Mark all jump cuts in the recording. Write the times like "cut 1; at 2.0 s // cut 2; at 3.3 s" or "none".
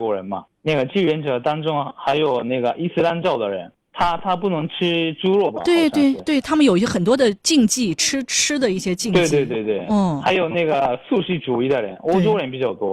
none